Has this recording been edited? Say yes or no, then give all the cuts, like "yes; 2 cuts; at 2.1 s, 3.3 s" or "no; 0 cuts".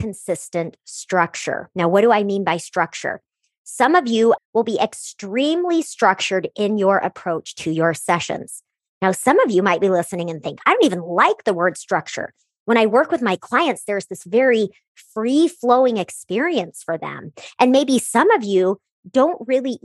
yes; 1 cut; at 4.4 s